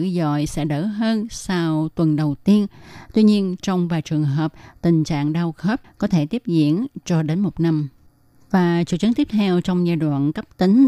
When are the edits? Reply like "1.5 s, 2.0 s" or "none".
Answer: none